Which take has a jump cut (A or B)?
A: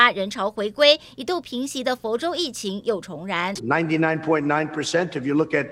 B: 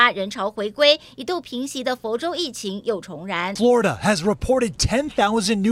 A